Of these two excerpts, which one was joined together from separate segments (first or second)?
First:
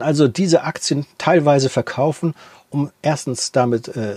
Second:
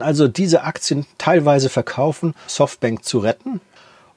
second